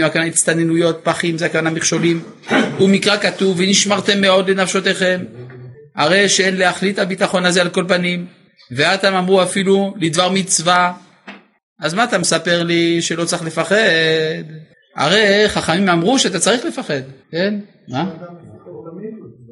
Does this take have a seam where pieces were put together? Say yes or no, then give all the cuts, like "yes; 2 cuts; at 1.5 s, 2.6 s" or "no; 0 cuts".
yes; 1 cut; at 17.2 s